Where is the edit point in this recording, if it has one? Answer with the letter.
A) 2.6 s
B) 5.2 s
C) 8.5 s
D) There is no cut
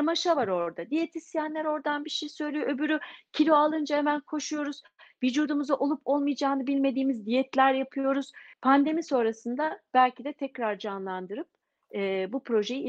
C